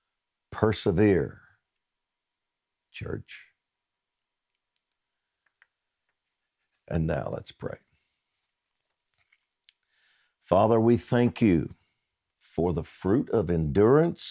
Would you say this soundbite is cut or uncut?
uncut